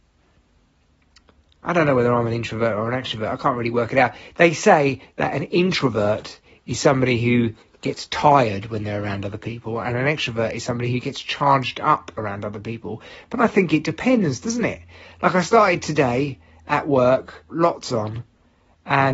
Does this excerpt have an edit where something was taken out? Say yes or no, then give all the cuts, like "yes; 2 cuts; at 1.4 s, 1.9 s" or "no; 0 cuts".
yes; 1 cut; at 17.5 s